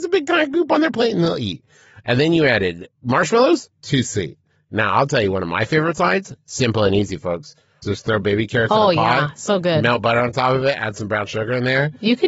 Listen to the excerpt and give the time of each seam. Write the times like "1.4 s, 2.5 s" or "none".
7.8 s